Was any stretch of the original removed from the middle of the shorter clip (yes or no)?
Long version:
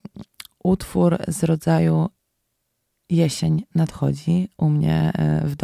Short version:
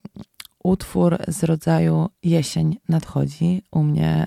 yes